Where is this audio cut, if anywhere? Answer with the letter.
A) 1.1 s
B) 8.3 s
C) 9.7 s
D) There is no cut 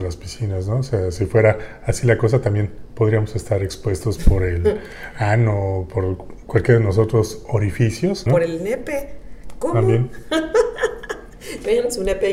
B